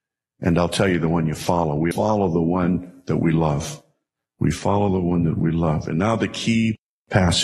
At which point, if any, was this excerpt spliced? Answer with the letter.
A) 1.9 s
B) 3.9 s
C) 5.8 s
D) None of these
A